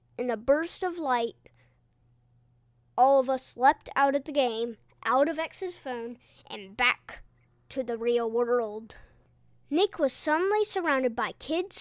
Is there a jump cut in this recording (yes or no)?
no